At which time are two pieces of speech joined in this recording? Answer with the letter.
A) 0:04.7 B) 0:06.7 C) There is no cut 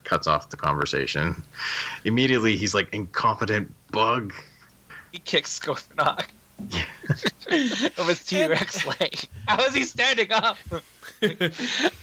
A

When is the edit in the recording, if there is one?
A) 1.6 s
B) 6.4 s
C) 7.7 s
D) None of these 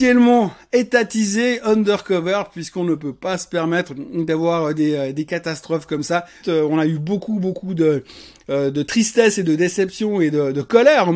B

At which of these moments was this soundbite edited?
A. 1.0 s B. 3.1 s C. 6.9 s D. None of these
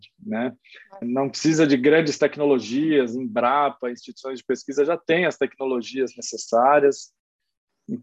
A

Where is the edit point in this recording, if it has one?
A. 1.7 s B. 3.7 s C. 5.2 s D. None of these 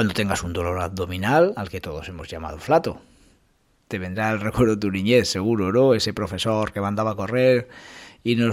D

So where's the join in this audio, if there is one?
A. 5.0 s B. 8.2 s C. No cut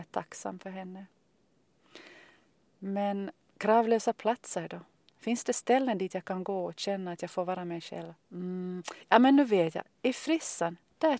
B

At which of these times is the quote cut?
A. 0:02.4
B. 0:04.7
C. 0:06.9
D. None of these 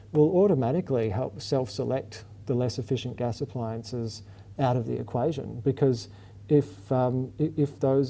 D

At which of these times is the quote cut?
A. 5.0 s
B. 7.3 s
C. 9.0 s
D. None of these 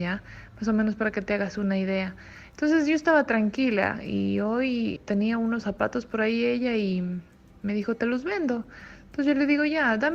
A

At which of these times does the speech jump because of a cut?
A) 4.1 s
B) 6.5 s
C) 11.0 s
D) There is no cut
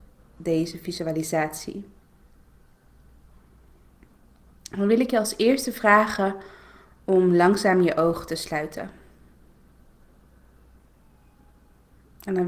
D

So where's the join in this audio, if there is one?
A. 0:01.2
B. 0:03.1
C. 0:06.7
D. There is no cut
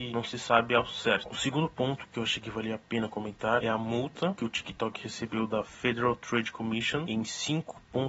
A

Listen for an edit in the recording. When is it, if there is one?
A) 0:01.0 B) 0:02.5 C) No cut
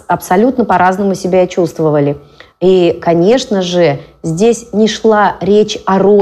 B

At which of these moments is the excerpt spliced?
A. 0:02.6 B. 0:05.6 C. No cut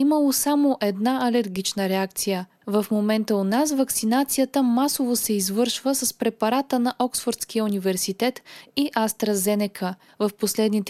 A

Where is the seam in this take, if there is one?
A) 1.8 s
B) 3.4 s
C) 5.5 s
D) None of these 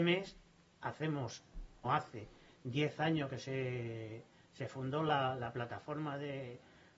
A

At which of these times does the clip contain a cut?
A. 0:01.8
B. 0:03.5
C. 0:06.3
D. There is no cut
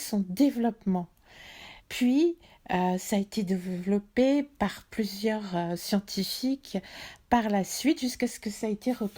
A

